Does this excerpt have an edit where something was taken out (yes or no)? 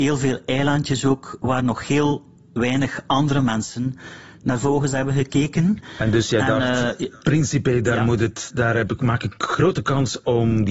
no